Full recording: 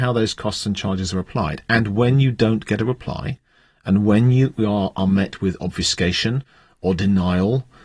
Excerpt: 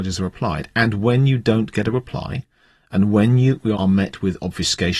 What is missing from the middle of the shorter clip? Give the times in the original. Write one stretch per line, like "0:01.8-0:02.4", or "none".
0:04.7-0:04.9